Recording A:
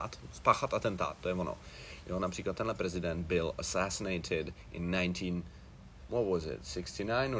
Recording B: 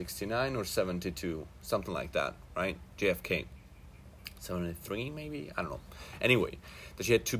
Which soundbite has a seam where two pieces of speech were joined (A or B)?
A